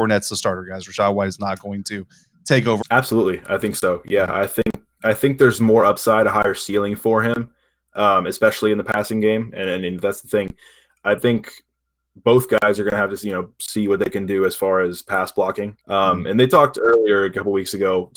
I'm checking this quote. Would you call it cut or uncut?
cut